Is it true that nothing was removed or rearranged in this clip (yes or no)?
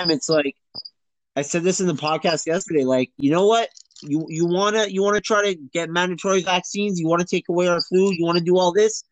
yes